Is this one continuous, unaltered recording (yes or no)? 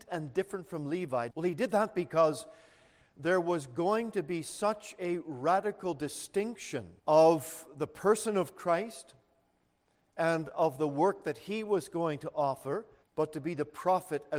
no